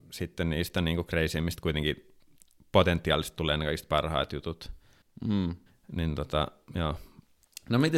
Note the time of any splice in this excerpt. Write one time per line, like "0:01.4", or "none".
none